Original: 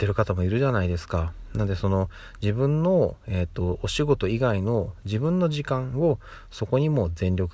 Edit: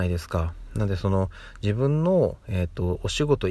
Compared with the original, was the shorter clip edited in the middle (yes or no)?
no